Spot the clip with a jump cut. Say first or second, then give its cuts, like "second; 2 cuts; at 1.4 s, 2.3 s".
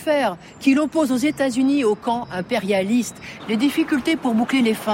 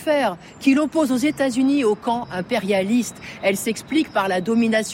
first; 1 cut; at 3.4 s